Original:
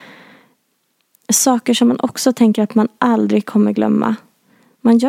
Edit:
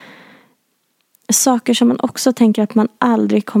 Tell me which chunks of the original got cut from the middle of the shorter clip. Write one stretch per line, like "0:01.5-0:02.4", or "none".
none